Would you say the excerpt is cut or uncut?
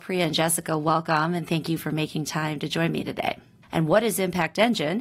cut